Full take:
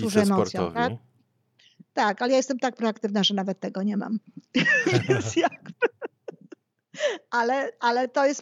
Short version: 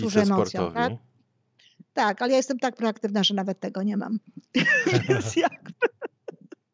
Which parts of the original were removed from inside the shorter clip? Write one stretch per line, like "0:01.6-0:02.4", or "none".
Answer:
none